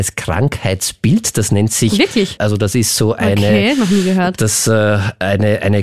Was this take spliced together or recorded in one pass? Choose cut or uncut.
cut